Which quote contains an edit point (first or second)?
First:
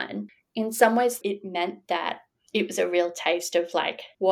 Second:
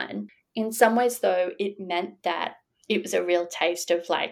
first